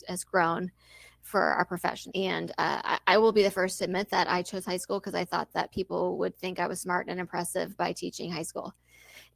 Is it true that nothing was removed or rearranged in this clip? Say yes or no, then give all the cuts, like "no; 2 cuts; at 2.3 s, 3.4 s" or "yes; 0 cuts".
no; 1 cut; at 2.1 s